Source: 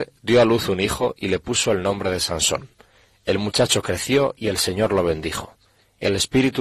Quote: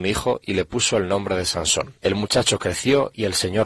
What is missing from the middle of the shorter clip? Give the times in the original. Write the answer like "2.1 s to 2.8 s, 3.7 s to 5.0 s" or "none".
2.7 s to 3.2 s